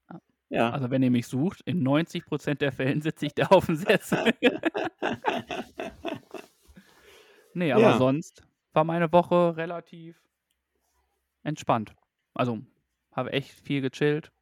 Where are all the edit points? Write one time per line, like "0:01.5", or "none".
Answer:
none